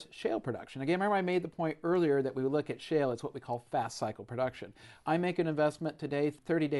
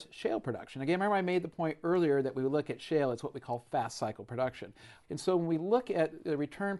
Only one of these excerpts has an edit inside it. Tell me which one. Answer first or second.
second